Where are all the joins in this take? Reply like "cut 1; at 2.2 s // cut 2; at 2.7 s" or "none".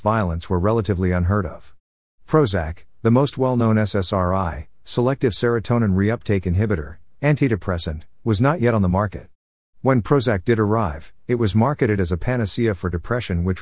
none